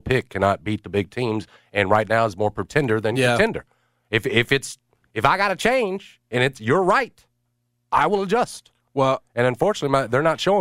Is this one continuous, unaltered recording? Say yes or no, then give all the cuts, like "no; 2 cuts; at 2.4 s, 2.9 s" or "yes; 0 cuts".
yes; 0 cuts